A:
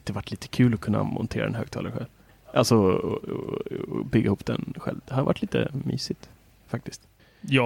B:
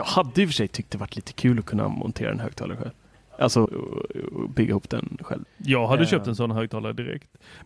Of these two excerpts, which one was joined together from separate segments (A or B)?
B